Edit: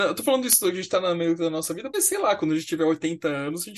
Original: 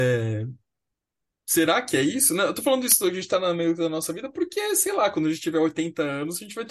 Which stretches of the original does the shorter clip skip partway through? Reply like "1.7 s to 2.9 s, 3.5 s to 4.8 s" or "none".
4.3 s to 4.7 s